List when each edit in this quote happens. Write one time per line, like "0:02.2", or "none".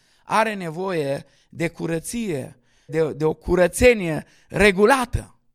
0:02.9